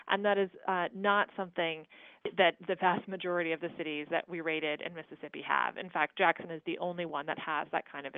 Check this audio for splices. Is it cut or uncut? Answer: uncut